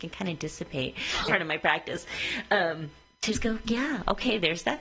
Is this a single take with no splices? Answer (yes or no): no